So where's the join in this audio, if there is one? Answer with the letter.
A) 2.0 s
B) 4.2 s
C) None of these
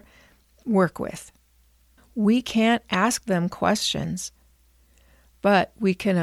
A